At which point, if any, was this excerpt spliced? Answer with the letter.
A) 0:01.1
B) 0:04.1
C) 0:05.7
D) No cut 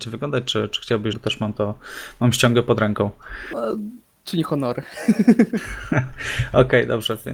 A